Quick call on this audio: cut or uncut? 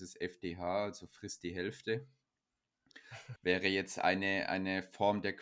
cut